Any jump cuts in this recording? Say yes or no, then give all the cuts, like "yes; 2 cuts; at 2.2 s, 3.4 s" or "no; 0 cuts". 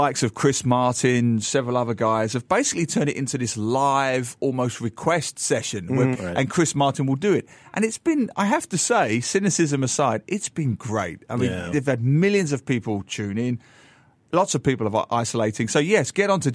yes; 1 cut; at 6.1 s